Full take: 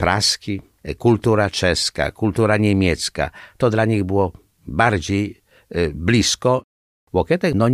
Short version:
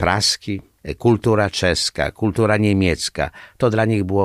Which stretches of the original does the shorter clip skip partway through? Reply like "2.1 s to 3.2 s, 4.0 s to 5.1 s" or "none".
none

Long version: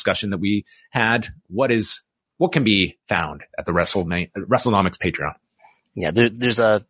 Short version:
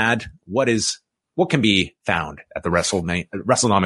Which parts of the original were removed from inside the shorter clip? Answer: none

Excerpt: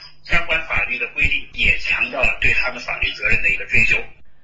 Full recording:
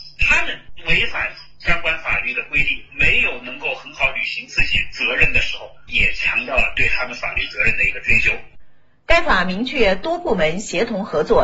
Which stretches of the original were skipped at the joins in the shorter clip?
2.9 s to 5.9 s

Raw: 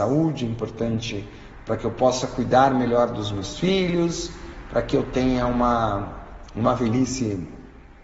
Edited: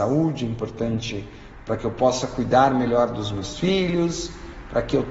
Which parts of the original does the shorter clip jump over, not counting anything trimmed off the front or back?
none

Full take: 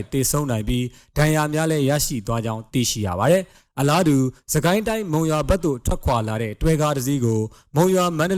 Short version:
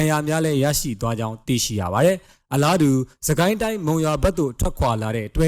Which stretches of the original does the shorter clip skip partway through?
none

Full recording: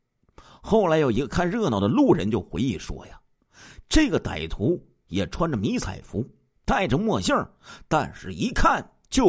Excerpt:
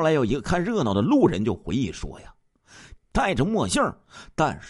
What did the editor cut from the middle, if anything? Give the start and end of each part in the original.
3.8 s to 6.5 s

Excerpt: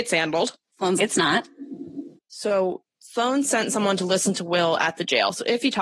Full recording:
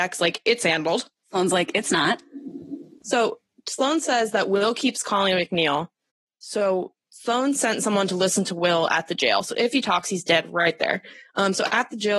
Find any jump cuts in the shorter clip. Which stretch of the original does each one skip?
1.5 s to 1.7 s, 2.9 s to 6.3 s

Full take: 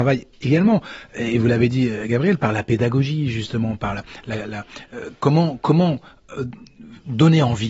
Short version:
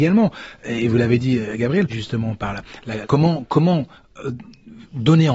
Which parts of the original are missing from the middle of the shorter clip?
2.4 s to 3.3 s, 4.4 s to 5.2 s

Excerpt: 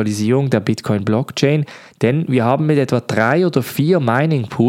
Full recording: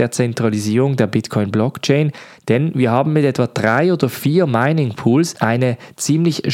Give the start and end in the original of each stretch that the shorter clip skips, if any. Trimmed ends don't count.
none

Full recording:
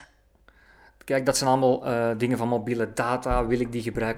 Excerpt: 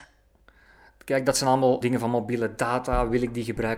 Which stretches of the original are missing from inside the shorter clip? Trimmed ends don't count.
1.8 s to 2.2 s

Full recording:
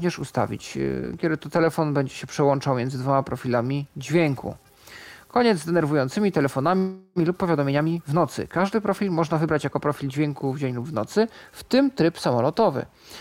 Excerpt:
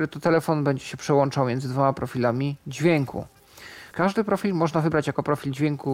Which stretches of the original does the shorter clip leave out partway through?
5.2 s to 8.5 s

